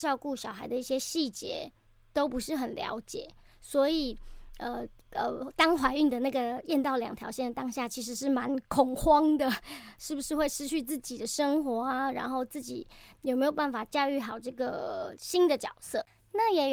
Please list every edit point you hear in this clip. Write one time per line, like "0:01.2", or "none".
none